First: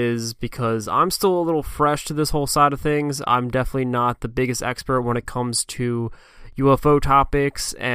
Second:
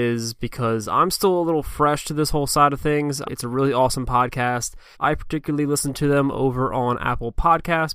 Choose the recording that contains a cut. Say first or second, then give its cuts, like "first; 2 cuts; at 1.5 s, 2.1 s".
second; 2 cuts; at 3.2 s, 4.9 s